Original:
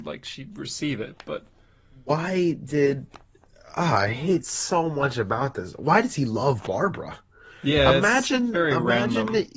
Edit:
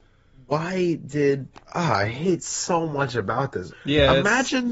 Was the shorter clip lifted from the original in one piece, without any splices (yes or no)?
no